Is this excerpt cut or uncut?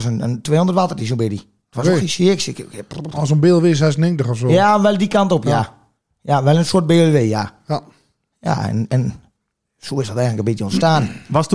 uncut